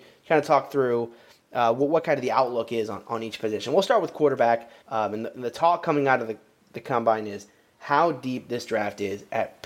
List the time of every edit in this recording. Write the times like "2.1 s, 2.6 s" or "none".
4.8 s